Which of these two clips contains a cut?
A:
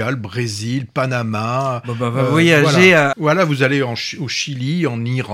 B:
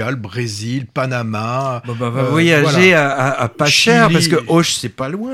A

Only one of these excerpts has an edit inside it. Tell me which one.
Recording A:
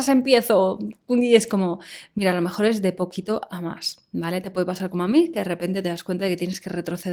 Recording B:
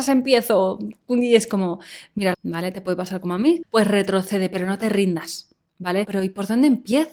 B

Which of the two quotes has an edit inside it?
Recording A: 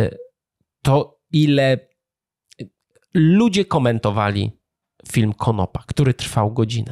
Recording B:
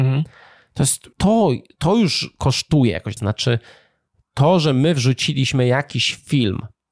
B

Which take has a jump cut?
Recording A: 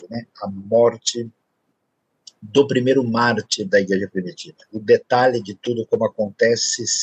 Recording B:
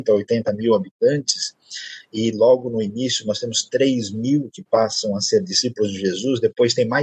A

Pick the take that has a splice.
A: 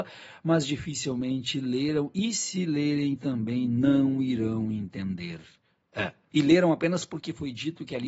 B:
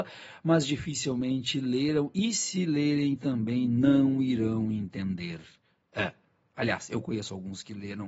A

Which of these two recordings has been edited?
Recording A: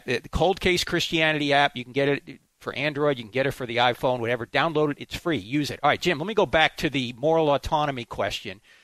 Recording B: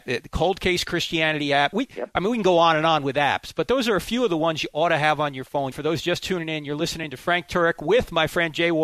B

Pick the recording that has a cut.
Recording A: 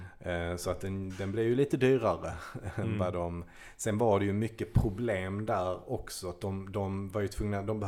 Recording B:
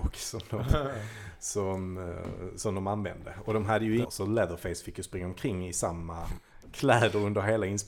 B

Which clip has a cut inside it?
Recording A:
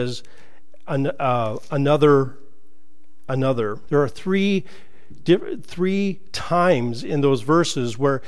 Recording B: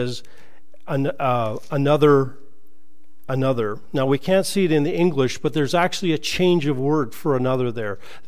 A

